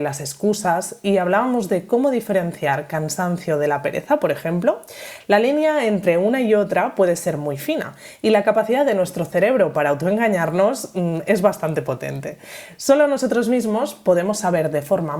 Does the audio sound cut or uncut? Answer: uncut